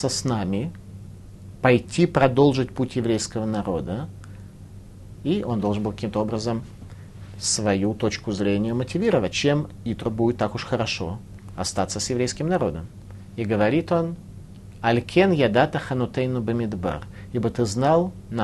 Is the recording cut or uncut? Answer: cut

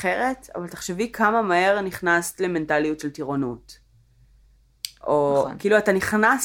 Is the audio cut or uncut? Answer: uncut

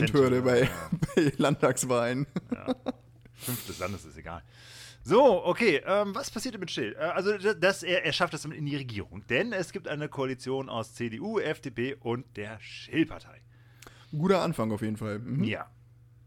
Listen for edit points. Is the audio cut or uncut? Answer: uncut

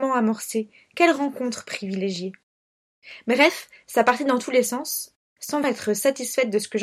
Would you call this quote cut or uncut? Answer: cut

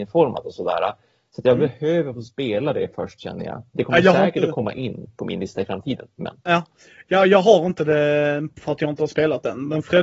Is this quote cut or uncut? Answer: uncut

